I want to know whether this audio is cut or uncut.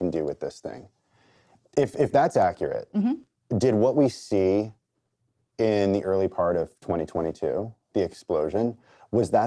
uncut